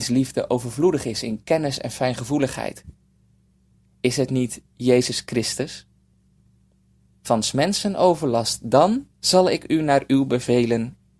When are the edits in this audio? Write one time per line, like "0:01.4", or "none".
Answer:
0:07.2
0:09.1